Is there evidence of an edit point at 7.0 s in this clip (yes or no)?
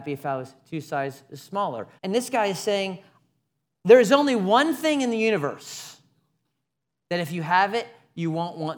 no